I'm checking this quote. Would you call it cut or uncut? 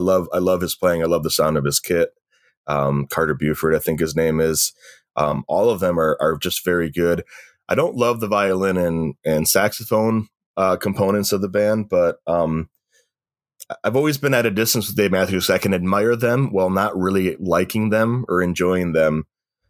uncut